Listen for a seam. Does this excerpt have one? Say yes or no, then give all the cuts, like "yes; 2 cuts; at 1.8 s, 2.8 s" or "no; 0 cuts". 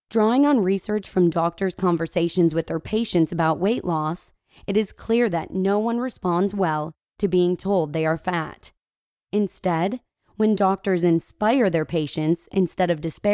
no; 0 cuts